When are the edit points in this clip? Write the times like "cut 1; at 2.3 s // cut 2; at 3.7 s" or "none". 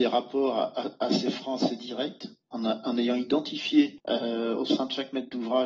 cut 1; at 2.4 s